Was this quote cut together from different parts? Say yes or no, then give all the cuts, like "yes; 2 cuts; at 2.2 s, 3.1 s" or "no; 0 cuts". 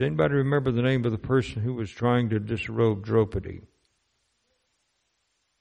no; 0 cuts